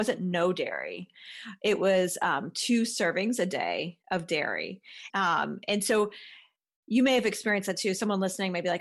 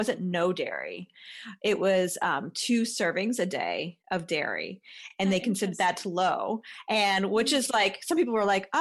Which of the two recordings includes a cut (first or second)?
first